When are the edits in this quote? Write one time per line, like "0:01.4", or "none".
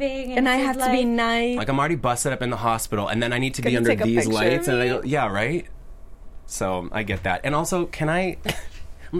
0:01.6